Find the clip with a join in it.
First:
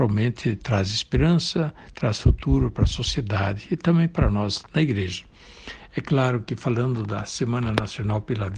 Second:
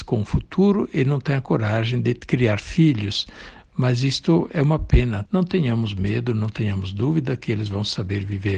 second; 1 cut; at 5.3 s

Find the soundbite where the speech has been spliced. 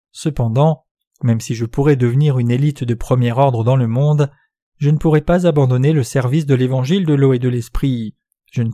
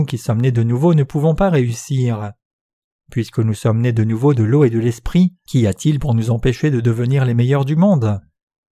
second; 1 cut; at 5.5 s

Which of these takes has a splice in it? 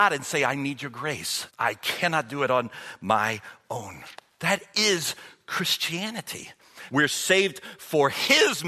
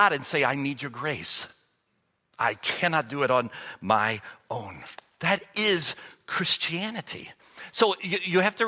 first; 2 cuts; at 1.5 s, 6.9 s

